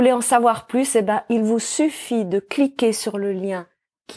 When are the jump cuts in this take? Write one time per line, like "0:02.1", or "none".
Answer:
none